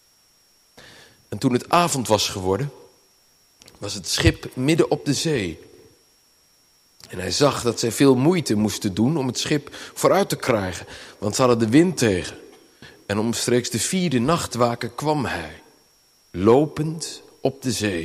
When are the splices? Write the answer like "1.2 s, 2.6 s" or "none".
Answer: 6.9 s